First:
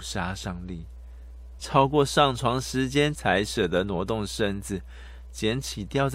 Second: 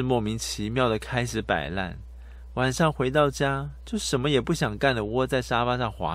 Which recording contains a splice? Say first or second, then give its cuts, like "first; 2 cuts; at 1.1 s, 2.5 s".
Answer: first; 2 cuts; at 1.6 s, 3.1 s